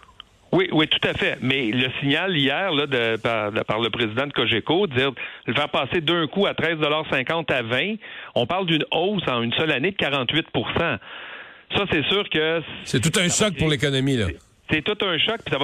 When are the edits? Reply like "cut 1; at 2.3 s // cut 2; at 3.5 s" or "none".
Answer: none